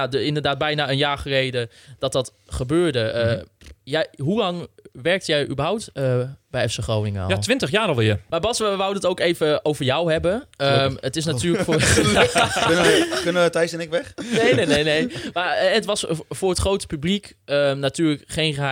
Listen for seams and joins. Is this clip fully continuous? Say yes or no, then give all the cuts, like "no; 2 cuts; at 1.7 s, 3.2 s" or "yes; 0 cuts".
no; 1 cut; at 8.3 s